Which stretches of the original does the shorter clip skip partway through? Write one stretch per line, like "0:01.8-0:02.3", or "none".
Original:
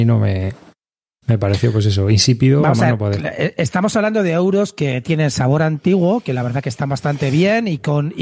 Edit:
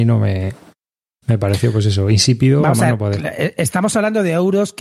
none